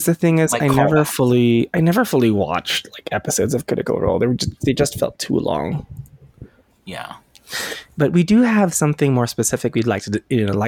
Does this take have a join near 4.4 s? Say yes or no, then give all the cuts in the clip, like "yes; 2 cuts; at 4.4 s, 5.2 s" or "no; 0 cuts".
no; 1 cut; at 6.7 s